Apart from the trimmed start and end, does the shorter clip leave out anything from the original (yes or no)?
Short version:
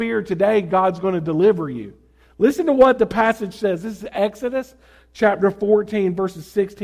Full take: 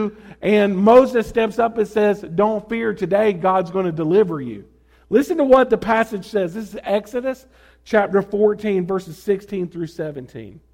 no